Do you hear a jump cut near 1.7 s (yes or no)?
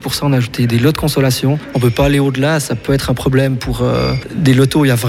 yes